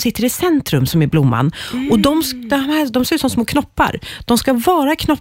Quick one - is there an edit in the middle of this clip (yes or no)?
no